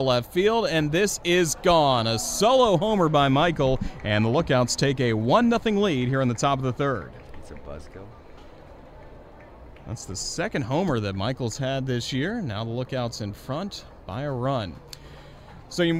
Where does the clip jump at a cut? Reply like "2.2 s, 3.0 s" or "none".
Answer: none